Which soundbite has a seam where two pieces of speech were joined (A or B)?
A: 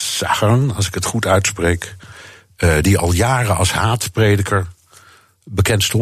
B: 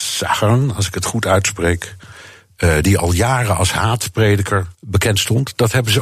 B